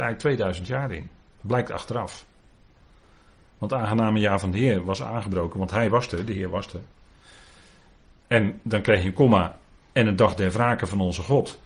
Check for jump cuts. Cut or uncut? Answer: uncut